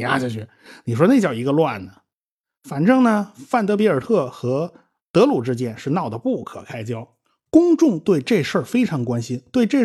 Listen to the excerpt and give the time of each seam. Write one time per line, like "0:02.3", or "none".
none